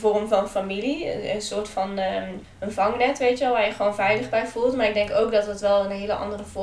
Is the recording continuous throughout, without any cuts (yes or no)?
yes